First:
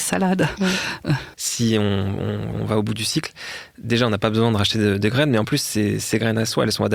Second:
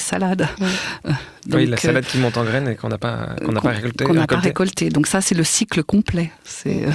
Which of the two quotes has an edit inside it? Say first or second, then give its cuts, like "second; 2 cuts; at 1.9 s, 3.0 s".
first; 2 cuts; at 1.3 s, 2.5 s